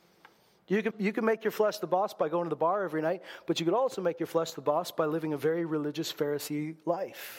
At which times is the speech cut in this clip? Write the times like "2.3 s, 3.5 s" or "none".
0.9 s